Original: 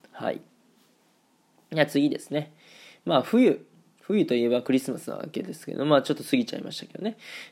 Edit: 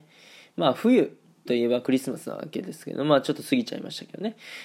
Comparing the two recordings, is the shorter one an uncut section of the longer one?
no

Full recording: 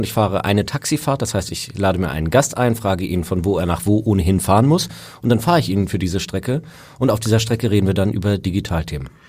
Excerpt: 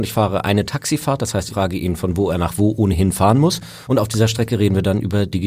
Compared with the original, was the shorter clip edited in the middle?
yes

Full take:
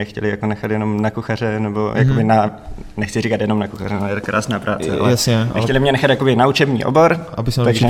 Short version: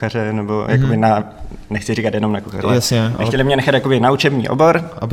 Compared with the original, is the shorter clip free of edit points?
no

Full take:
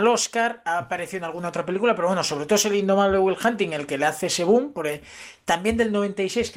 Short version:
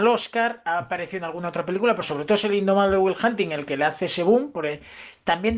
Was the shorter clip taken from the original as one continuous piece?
no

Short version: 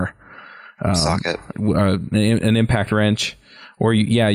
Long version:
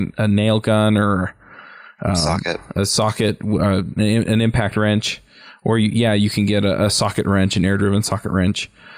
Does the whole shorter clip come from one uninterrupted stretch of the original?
no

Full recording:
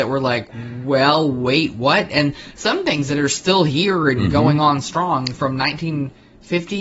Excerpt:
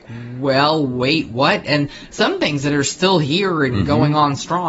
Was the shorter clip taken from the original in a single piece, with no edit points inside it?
yes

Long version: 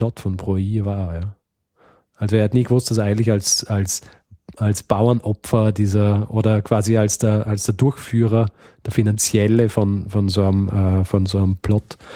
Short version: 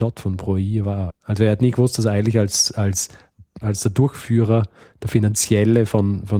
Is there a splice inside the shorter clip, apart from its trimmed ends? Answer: yes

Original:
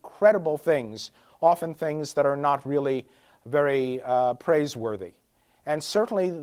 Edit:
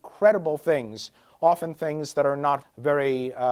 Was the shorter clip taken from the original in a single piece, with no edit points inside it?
no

